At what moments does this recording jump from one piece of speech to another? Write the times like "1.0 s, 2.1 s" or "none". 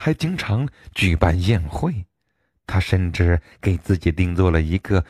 none